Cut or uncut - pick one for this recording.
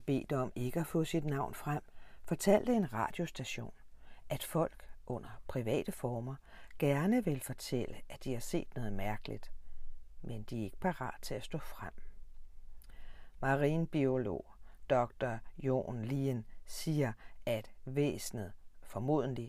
uncut